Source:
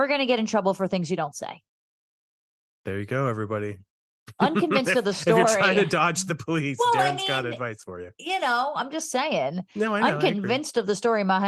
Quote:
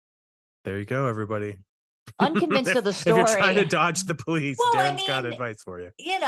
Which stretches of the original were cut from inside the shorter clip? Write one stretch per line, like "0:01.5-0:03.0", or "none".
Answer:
none